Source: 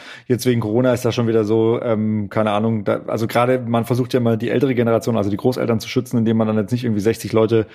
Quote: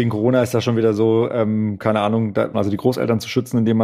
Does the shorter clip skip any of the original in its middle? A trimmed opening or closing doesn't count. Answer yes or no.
yes